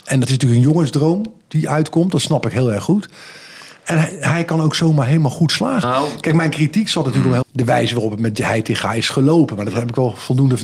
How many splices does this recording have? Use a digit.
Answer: 2